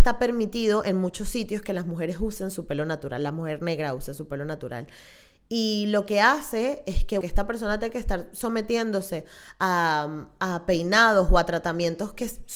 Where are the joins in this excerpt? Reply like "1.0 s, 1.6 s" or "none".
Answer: 7.2 s